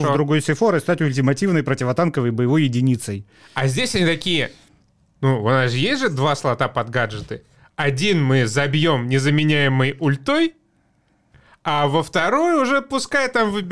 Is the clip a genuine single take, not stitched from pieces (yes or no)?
yes